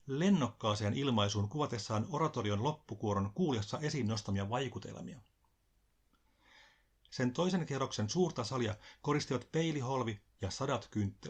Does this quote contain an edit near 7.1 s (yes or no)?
yes